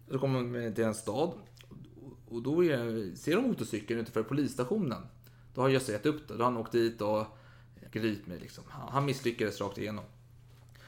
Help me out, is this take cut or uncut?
cut